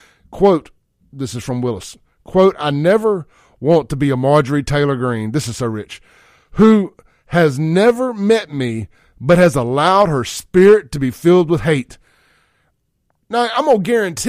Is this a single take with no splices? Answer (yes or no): no